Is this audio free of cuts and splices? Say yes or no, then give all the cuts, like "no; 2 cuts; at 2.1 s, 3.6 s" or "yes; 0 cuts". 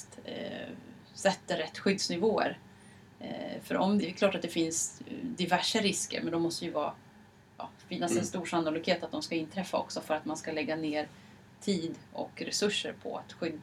no; 1 cut; at 4.0 s